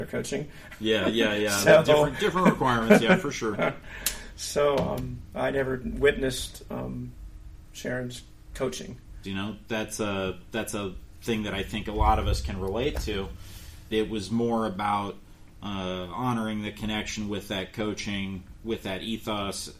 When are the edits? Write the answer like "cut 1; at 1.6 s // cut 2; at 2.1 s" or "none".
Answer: cut 1; at 9.2 s // cut 2; at 13.9 s